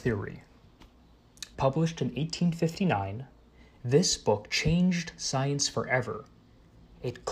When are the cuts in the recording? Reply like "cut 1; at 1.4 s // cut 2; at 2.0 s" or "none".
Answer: cut 1; at 1.5 s